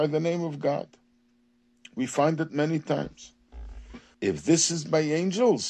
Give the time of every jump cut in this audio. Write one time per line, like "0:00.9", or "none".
0:04.1